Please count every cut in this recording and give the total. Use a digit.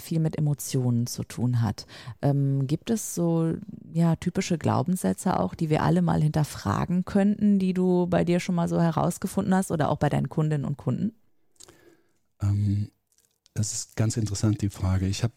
0